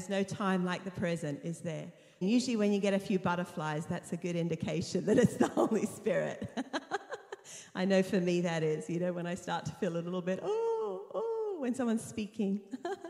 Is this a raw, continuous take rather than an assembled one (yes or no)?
no